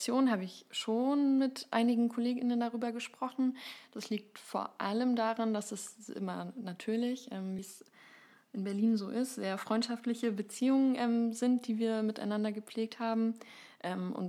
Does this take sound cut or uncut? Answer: uncut